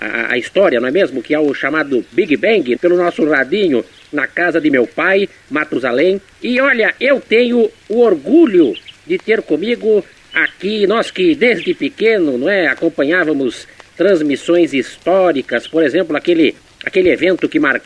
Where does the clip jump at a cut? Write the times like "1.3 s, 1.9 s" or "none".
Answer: 2.8 s, 6.4 s